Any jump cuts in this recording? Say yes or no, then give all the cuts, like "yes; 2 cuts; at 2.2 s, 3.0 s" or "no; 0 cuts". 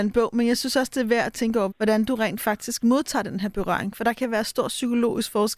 yes; 1 cut; at 1.7 s